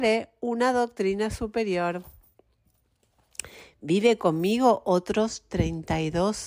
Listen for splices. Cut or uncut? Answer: uncut